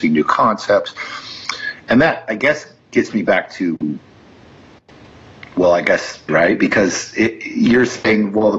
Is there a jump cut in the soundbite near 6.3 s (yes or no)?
yes